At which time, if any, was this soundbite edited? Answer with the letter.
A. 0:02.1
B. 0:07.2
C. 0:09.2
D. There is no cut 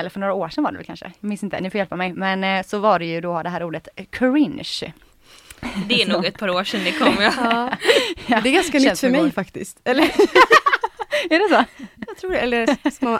D